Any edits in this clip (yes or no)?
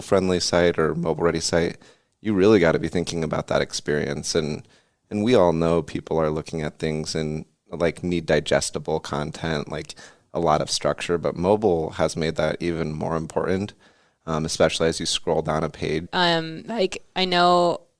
yes